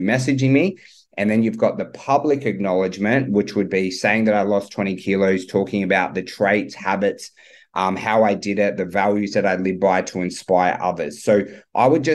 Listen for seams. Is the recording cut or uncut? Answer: uncut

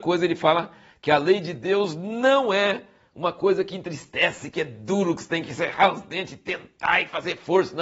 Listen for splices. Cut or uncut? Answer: uncut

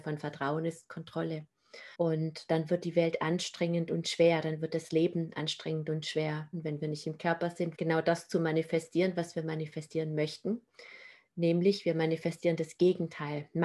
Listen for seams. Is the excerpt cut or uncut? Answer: cut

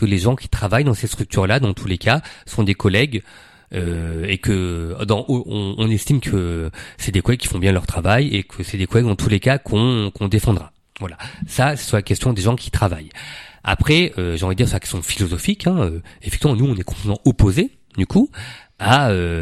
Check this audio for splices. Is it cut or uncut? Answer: uncut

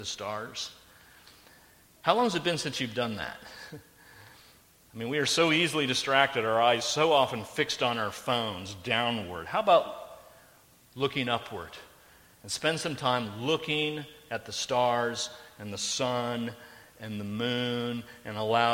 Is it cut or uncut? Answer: uncut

